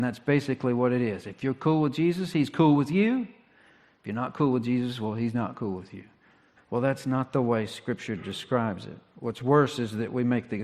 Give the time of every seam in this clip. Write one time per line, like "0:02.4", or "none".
0:06.6